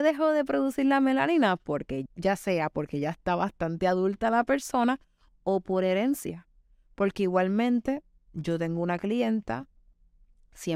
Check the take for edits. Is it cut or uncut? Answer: cut